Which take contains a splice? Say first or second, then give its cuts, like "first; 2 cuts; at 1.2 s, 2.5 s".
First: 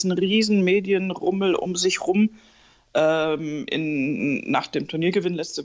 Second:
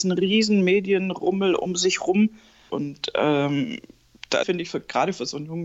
second; 2 cuts; at 2.7 s, 4.4 s